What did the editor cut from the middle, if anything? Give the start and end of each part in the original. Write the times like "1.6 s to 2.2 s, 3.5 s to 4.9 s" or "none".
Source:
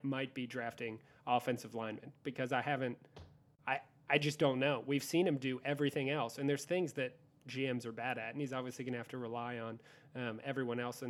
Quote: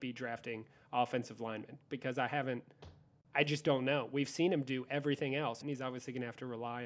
3.6 s to 4.0 s, 6.4 s to 8.3 s